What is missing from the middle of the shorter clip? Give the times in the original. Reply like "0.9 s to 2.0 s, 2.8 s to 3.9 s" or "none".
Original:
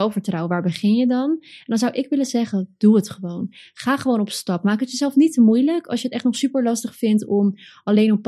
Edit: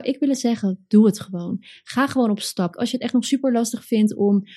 4.6 s to 5.8 s